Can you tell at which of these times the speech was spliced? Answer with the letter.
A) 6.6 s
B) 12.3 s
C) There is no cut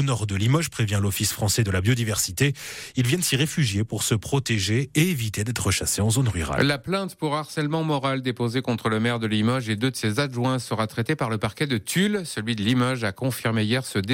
C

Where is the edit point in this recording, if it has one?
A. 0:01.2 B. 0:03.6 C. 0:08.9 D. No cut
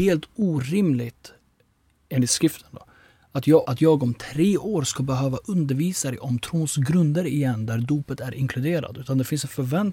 B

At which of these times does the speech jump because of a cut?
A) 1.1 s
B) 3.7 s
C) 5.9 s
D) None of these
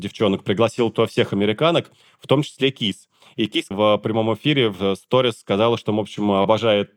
B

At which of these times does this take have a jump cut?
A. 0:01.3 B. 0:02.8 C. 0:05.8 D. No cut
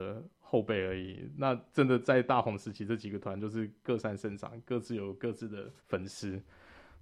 C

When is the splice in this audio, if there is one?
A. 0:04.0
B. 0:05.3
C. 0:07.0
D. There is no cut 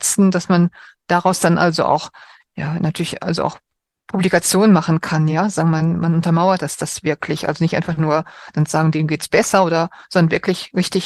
D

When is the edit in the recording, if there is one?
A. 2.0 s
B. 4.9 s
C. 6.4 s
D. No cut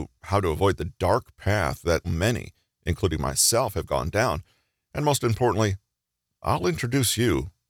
A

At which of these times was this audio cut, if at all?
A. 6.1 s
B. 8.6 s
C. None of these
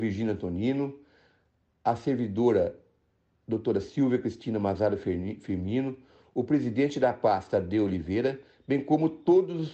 C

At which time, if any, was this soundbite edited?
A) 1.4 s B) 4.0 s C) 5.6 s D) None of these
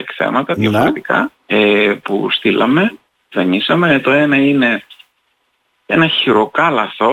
A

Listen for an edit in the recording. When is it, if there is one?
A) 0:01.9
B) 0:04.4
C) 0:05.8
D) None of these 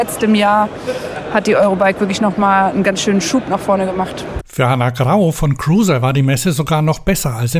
B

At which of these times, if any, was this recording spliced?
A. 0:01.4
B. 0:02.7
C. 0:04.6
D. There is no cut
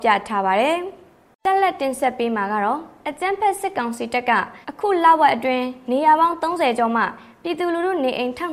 C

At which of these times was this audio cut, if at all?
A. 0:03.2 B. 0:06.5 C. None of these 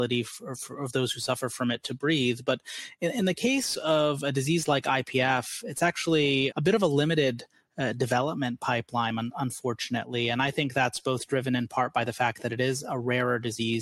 B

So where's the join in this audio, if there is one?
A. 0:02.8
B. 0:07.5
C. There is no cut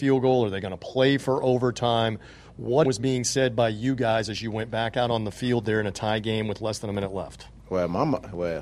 A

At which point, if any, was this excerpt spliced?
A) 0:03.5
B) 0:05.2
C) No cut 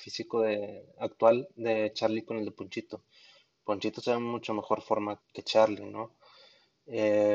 B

